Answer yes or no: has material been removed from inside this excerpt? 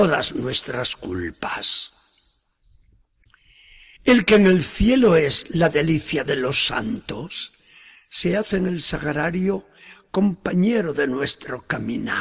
yes